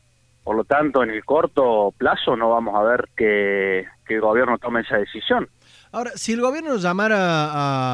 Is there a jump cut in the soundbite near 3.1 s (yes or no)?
yes